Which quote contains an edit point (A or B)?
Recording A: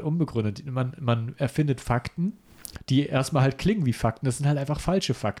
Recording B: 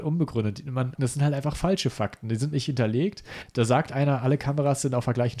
B